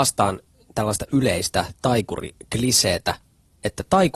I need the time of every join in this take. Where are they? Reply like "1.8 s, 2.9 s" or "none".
none